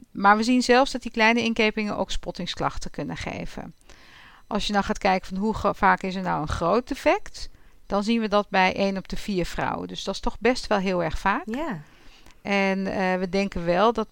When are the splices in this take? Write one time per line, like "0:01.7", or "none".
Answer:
none